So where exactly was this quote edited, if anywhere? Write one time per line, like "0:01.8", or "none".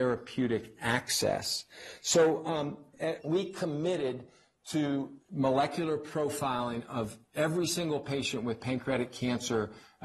0:03.2
0:05.2